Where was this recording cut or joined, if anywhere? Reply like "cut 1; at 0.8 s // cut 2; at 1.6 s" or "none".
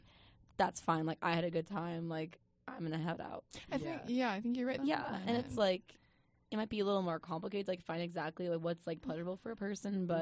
cut 1; at 4.8 s